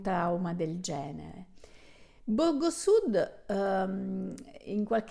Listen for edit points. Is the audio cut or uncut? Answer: uncut